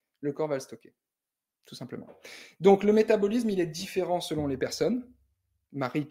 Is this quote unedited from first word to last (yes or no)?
yes